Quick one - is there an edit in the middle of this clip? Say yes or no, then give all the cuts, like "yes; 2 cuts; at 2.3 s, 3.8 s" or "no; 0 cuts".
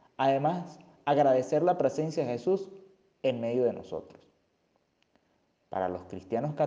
no; 0 cuts